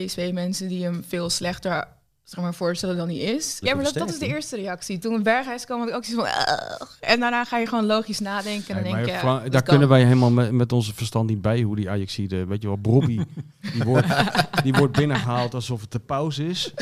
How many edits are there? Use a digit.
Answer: 1